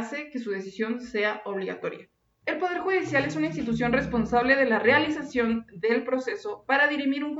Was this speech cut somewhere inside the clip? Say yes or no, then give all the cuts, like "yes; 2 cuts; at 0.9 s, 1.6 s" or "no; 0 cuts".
yes; 1 cut; at 2.4 s